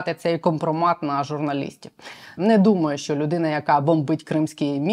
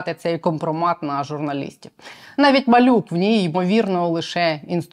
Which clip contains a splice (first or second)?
first